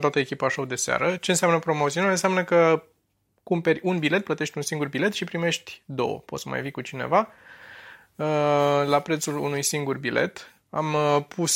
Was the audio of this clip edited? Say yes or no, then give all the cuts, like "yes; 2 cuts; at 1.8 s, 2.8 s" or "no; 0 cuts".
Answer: no; 0 cuts